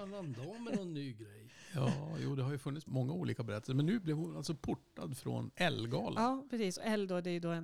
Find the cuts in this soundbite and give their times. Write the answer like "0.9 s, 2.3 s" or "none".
2.9 s